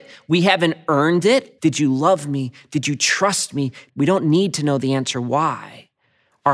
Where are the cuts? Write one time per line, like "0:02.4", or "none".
0:01.6
0:03.9